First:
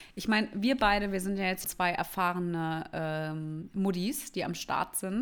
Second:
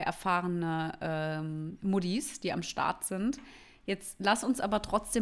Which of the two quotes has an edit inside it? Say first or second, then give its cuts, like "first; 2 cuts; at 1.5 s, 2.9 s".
first; 1 cut; at 1.6 s